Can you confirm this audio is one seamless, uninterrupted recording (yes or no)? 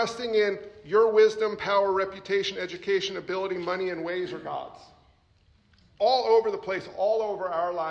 yes